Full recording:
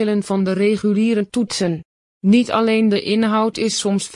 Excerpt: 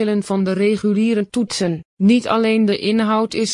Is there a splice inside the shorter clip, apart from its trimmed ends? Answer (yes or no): yes